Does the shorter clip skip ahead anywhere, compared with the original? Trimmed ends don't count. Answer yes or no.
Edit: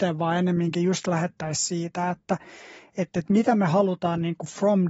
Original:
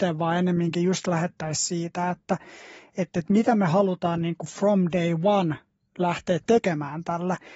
no